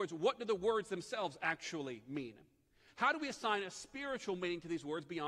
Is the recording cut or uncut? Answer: cut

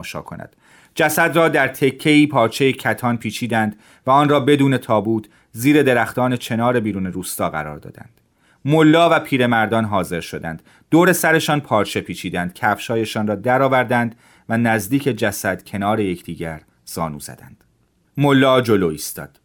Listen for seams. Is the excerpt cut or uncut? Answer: uncut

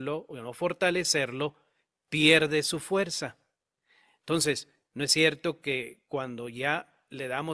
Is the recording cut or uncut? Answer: uncut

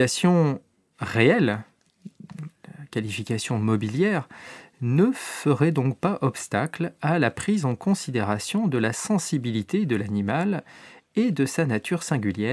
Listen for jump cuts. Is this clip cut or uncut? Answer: uncut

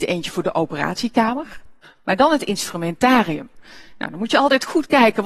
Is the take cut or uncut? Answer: cut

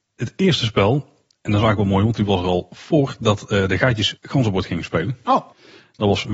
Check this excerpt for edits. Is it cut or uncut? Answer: uncut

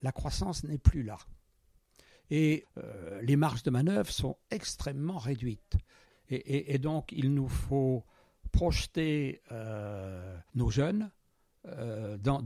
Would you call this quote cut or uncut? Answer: cut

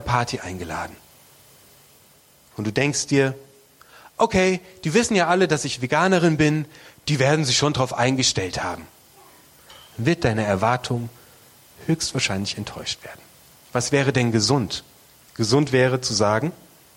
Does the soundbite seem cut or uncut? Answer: uncut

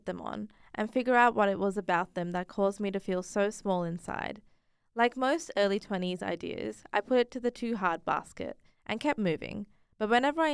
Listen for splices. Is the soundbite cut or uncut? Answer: uncut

